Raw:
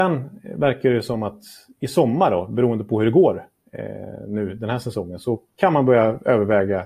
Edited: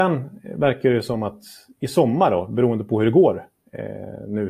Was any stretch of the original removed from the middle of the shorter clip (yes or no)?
no